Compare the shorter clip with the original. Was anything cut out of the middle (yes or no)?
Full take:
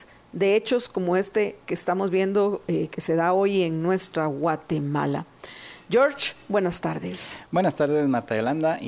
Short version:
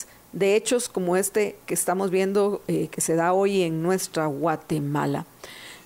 no